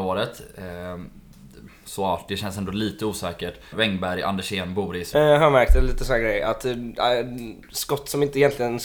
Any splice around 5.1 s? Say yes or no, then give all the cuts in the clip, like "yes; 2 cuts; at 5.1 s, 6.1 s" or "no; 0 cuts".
yes; 2 cuts; at 3.7 s, 5.1 s